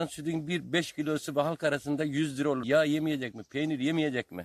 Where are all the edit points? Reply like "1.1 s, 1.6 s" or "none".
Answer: 2.6 s